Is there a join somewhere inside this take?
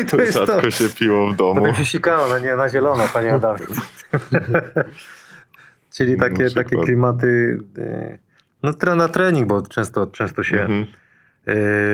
no; 0 cuts

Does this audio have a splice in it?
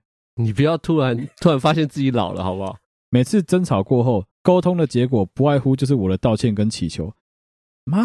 yes; 2 cuts; at 3.0 s, 4.3 s

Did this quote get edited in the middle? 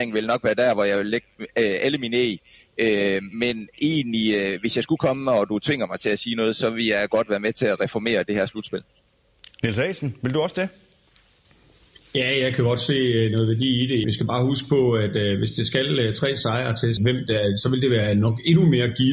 yes; 2 cuts; at 14.0 s, 17.0 s

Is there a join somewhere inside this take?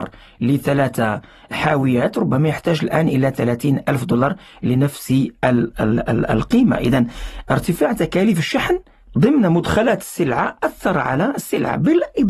no; 0 cuts

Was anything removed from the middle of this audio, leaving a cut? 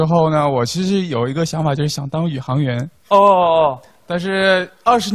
no; 0 cuts

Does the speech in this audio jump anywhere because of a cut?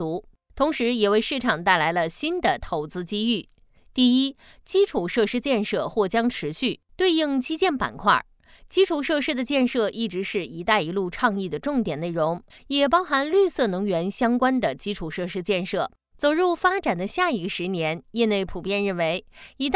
yes; 2 cuts; at 12.5 s, 16.1 s

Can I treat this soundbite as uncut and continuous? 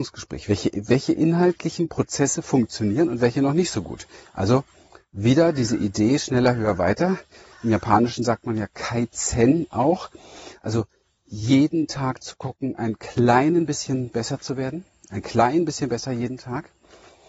yes; 0 cuts

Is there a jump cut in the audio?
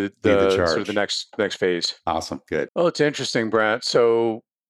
yes; 1 cut; at 2.7 s

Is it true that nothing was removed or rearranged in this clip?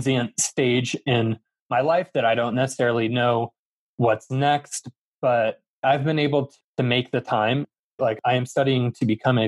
no; 1 cut; at 8.0 s

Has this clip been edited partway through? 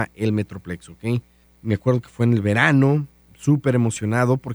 yes; 1 cut; at 1.4 s

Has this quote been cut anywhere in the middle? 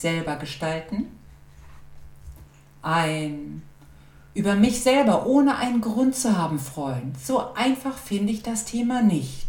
no; 0 cuts

